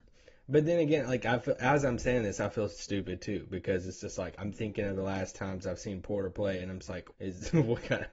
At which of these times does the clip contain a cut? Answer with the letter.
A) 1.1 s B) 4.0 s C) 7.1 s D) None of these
C